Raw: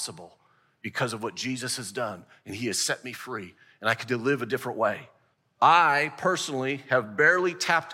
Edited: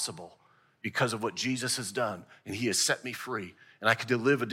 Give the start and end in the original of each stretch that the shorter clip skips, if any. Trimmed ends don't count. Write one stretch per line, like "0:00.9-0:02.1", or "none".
none